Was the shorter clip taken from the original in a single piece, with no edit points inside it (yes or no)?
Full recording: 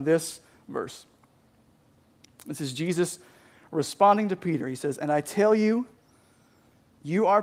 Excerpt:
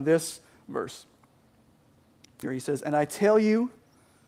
no